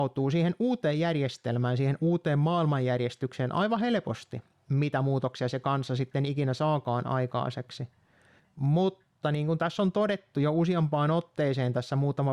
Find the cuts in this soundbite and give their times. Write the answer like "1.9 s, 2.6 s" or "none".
8.4 s